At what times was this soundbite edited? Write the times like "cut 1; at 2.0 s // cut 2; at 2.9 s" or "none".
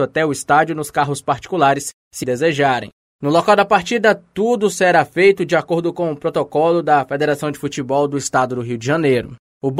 cut 1; at 2.2 s